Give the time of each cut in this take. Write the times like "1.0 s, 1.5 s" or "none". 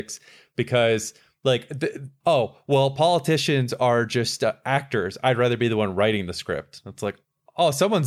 2.2 s